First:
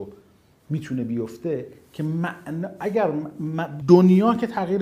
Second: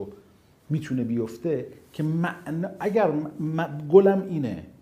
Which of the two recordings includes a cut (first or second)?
first